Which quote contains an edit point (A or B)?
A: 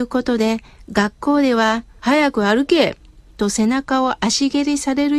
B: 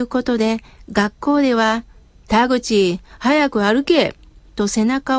A